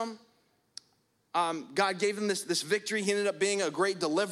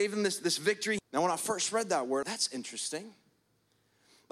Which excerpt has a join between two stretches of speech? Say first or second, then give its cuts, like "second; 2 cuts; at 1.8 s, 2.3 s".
second; 2 cuts; at 1.0 s, 2.2 s